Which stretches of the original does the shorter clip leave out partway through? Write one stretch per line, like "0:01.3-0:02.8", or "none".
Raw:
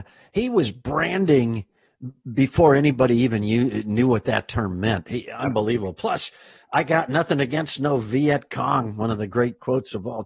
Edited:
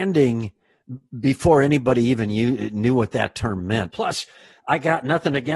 0:05.0-0:06.0